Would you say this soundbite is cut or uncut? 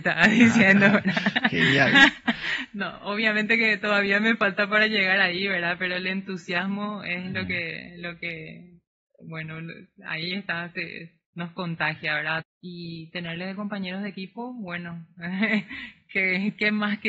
cut